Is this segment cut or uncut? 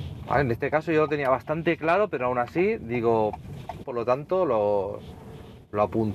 cut